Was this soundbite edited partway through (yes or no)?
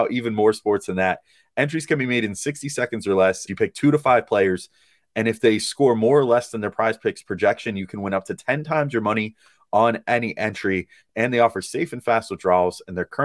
yes